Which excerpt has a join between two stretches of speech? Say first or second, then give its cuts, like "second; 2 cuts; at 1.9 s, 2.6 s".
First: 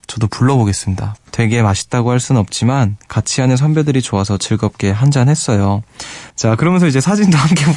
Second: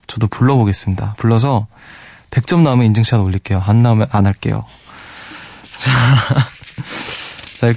first; 2 cuts; at 1.2 s, 6.3 s